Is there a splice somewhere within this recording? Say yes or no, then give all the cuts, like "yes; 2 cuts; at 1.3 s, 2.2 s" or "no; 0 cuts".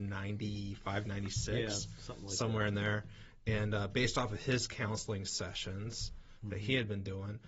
no; 0 cuts